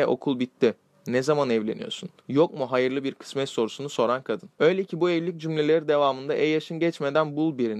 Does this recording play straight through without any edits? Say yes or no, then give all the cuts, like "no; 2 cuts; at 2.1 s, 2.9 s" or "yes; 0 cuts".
no; 1 cut; at 2.2 s